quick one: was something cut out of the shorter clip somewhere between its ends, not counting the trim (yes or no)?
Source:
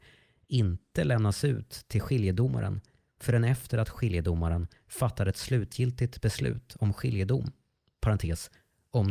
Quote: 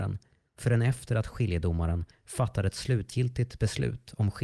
no